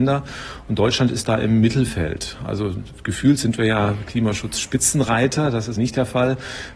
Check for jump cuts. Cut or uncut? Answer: cut